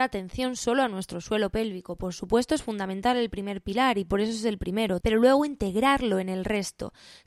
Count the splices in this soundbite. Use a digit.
1